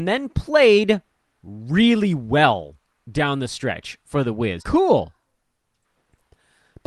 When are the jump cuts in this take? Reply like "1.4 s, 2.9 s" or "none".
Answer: 4.6 s